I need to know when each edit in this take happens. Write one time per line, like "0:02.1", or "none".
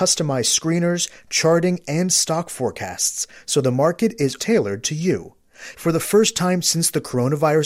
0:04.4
0:05.7